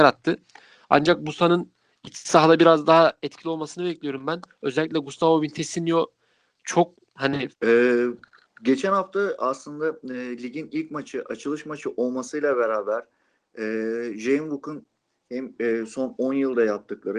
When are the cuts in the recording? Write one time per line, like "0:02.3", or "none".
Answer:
0:07.5